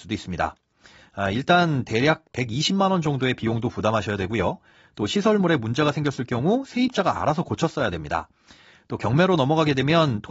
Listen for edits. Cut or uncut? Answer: uncut